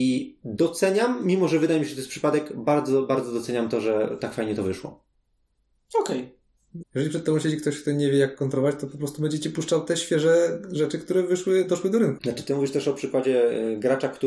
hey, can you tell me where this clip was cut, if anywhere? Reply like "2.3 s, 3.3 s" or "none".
6.8 s, 12.2 s